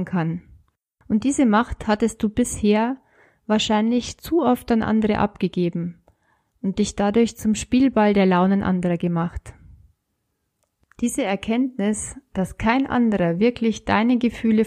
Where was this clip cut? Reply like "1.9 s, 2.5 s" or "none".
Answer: none